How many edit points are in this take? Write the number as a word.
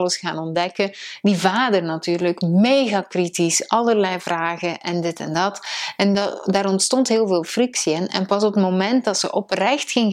zero